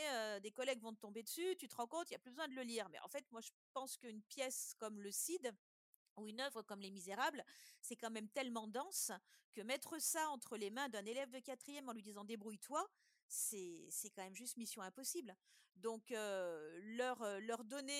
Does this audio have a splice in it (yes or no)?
no